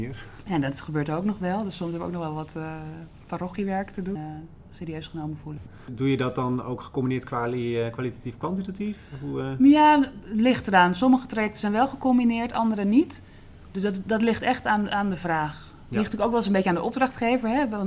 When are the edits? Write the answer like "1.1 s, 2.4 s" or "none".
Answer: 4.2 s